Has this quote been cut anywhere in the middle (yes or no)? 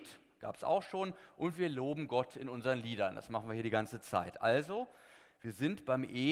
no